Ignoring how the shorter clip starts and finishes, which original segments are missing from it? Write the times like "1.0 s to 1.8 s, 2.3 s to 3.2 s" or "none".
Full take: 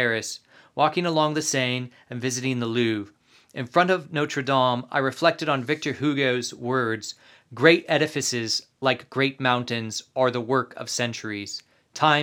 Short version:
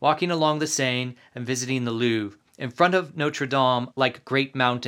3.2 s to 3.4 s, 4.9 s to 8.8 s